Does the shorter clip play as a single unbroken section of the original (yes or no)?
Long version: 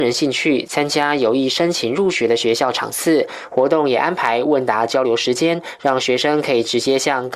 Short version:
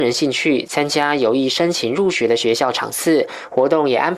yes